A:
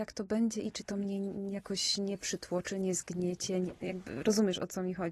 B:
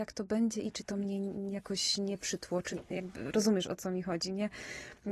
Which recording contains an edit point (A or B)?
B